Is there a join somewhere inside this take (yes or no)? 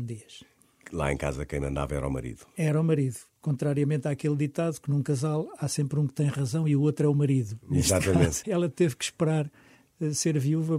yes